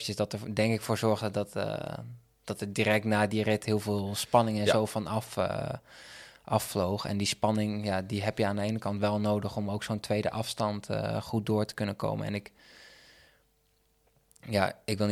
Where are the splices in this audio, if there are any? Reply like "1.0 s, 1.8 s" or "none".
none